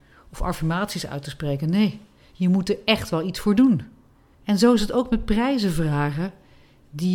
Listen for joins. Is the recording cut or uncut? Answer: cut